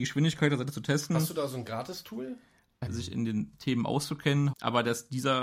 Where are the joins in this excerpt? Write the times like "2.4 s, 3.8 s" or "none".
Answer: 2.9 s, 4.5 s